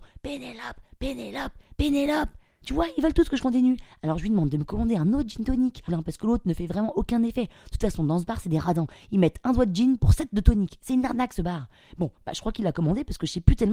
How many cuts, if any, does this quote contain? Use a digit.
1